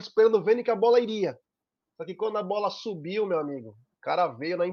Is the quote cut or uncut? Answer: uncut